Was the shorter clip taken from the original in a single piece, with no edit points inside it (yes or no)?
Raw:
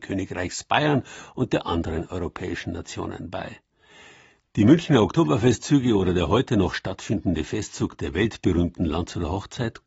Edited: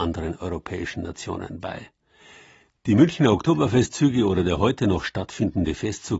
yes